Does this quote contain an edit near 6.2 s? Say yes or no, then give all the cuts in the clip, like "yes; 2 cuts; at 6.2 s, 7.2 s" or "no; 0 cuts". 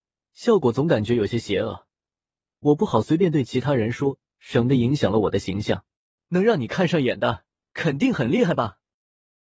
yes; 1 cut; at 6.2 s